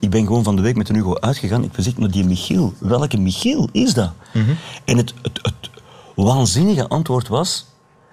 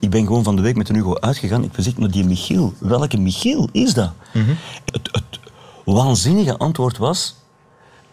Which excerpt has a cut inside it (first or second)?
second